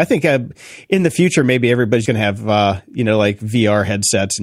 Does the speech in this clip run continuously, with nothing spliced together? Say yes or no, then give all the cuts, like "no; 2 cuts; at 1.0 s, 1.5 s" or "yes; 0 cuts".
no; 1 cut; at 2.0 s